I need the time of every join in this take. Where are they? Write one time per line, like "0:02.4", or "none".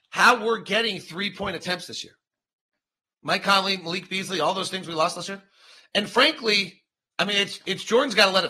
0:07.1